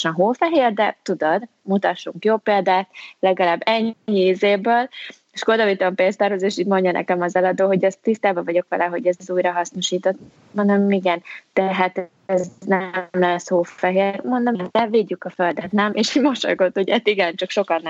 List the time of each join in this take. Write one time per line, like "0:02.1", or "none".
none

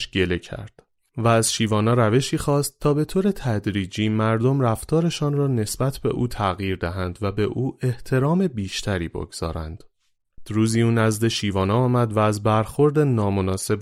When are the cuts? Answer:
0:10.4

